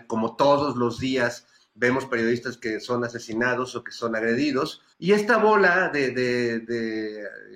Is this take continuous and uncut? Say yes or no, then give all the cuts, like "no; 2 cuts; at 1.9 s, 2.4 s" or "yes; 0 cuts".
no; 1 cut; at 4.9 s